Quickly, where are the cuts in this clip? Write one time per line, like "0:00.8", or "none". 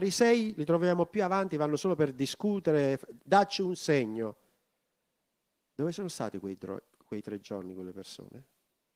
none